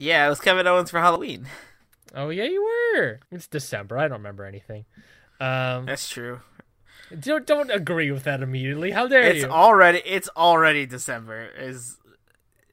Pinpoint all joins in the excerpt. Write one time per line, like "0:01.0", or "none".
0:03.2